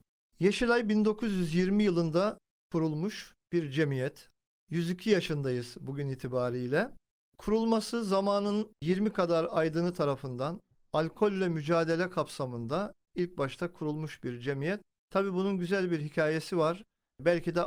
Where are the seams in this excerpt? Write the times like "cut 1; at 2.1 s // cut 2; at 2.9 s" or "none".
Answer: none